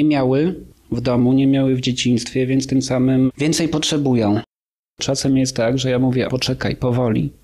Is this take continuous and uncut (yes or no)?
no